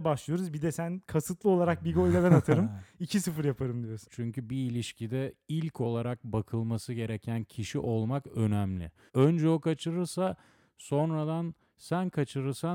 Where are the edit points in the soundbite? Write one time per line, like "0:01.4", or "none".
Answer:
0:04.1
0:09.1